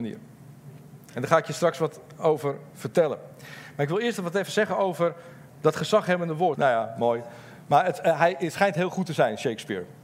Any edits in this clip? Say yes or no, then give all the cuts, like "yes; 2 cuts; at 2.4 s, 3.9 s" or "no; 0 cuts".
yes; 1 cut; at 6.6 s